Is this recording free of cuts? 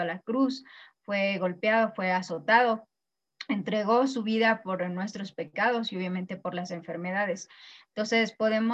yes; 0 cuts

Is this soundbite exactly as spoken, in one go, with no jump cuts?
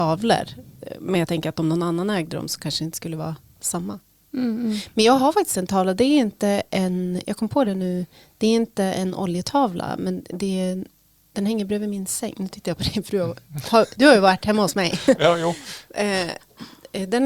yes; 0 cuts

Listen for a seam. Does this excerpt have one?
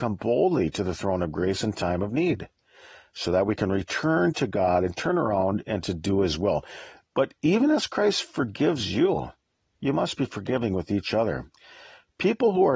no; 0 cuts

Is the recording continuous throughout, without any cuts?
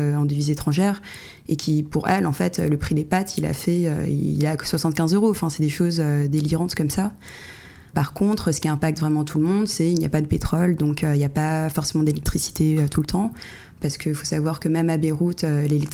yes; 0 cuts

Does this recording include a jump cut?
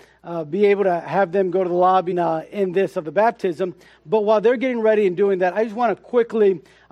yes; 1 cut; at 2.1 s

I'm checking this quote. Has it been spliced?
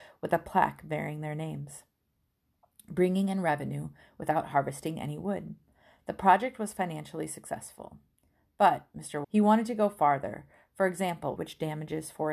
yes; 2 cuts; at 9.2 s, 11.4 s

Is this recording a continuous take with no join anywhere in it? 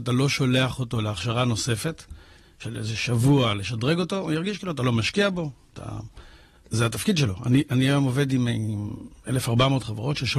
no; 1 cut; at 6.7 s

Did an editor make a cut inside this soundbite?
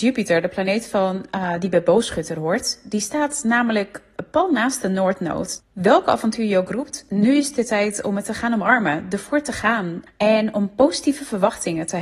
yes; 2 cuts; at 5.6 s, 10.1 s

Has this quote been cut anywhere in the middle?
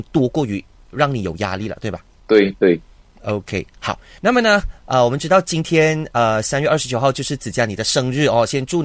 no; 0 cuts

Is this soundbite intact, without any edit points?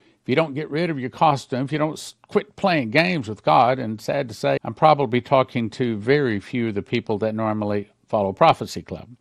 no; 1 cut; at 4.6 s

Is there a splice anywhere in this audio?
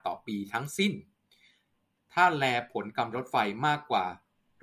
yes; 1 cut; at 3.1 s

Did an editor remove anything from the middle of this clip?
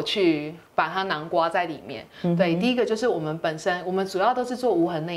no; 0 cuts

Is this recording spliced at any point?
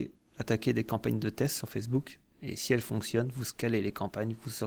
no; 0 cuts

